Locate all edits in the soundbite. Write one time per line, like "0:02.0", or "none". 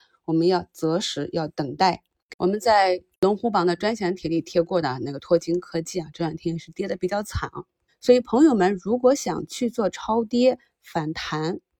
0:07.9